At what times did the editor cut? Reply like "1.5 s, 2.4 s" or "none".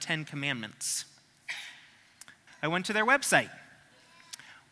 2.5 s